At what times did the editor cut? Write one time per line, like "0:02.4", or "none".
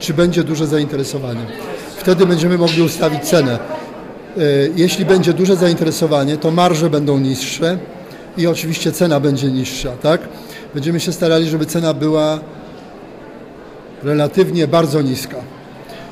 none

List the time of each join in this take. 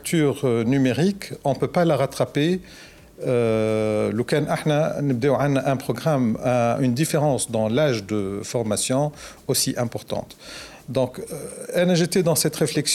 none

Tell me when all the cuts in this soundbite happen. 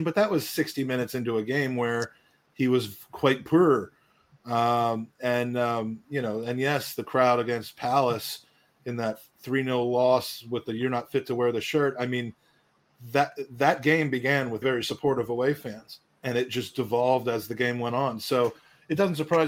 0:14.6

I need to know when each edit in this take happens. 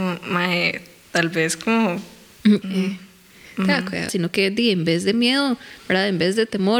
0:02.6
0:04.1

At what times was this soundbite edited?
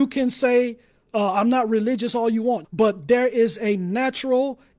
0:02.6

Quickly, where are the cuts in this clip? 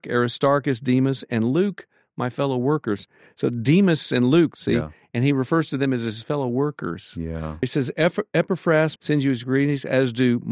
0:04.6
0:07.6
0:09.0

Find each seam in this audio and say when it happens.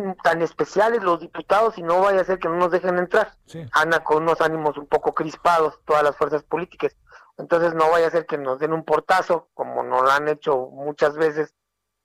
0:03.7

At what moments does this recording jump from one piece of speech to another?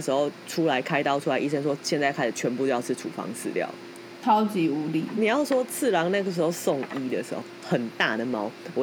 0:04.2
0:07.6

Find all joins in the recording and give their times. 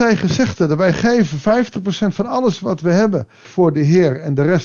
0:03.4

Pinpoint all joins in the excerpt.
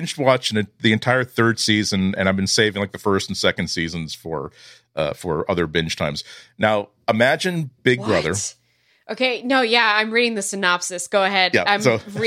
none

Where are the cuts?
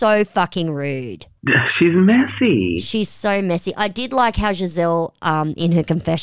none

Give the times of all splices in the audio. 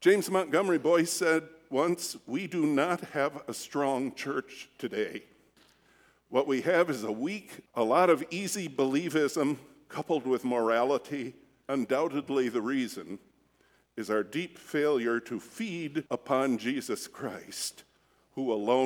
0:07.7
0:11.6
0:16.1

